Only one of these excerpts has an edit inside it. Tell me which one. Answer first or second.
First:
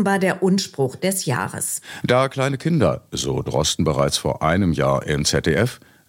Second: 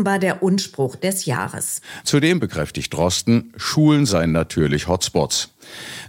second